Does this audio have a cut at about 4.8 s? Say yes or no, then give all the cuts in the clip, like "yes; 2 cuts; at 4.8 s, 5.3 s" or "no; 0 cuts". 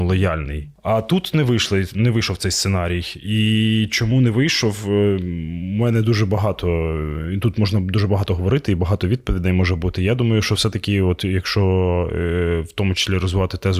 no; 0 cuts